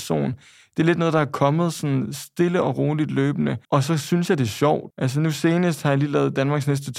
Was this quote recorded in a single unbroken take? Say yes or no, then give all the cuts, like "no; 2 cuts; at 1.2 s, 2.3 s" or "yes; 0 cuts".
no; 2 cuts; at 3.6 s, 4.9 s